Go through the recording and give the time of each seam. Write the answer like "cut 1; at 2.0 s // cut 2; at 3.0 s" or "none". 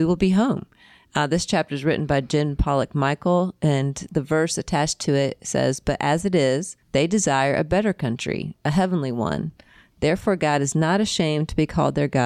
cut 1; at 6.8 s